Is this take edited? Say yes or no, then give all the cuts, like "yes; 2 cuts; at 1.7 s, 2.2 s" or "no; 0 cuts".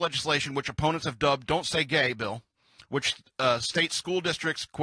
no; 0 cuts